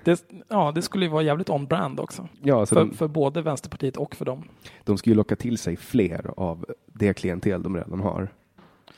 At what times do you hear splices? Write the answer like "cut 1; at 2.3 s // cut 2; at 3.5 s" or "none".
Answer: cut 1; at 2.3 s